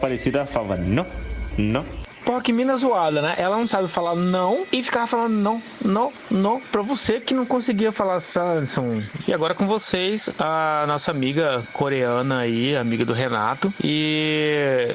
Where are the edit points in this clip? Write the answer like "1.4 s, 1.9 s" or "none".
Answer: 1.5 s, 9.2 s, 13.8 s